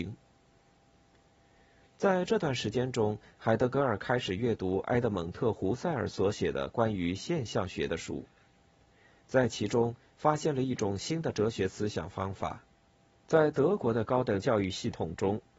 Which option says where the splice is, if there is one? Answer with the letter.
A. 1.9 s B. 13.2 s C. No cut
B